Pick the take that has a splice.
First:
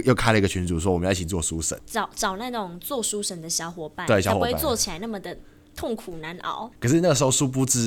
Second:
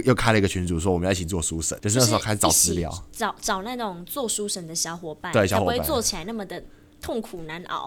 first; 2 cuts; at 1.8 s, 6.7 s

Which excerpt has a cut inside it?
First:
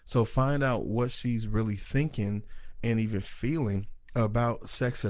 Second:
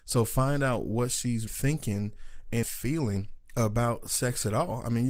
second; 2 cuts; at 1.5 s, 2.6 s

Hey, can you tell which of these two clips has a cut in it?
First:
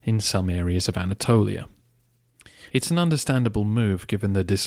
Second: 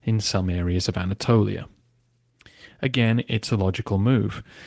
first; 1 cut; at 2.7 s

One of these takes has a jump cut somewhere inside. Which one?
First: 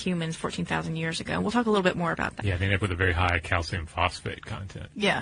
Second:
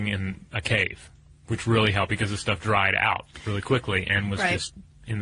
first; 1 cut; at 2.4 s

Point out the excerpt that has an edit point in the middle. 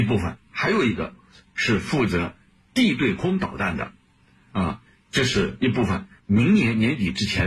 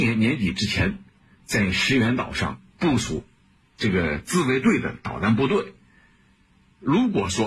first; 1 cut; at 6.2 s

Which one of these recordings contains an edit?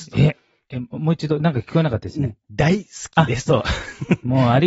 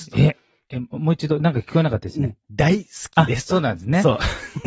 first; 1 cut; at 3.5 s

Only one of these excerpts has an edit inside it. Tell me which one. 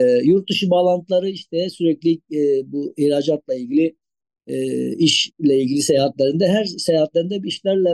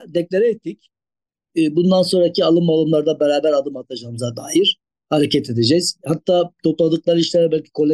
second; 1 cut; at 1.5 s

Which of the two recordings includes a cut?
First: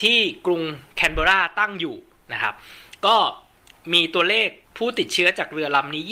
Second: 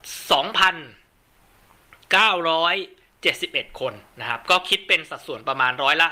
first; 1 cut; at 4.6 s

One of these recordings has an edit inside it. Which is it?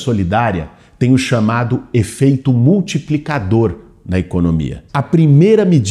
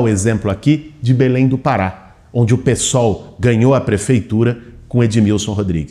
first; 1 cut; at 4.9 s

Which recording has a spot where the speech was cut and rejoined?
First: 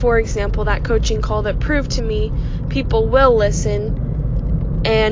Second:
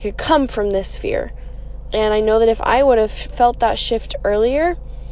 second; 1 cut; at 1.9 s

